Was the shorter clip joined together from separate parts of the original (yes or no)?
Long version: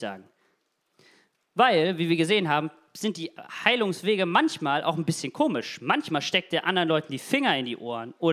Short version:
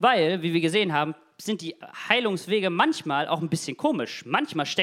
no